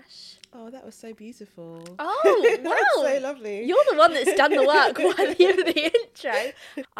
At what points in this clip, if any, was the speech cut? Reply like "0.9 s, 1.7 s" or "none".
none